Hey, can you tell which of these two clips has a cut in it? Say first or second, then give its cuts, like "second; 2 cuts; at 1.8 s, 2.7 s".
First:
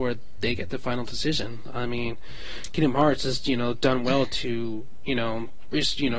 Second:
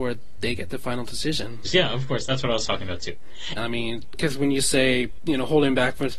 second; 2 cuts; at 1.6 s, 3.6 s